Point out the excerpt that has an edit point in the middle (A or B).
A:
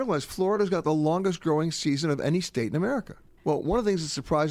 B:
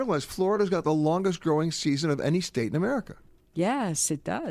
A